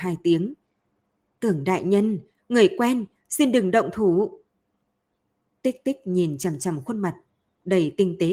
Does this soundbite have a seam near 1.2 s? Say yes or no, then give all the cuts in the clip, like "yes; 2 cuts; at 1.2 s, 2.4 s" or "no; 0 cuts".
no; 1 cut; at 2.4 s